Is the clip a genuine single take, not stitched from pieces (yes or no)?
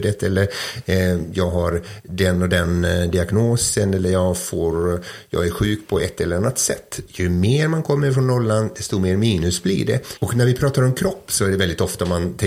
no